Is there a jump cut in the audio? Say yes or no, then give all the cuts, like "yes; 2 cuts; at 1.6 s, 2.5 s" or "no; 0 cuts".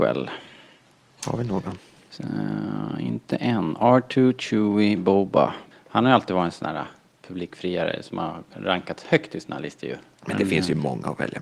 yes; 2 cuts; at 5.7 s, 10.2 s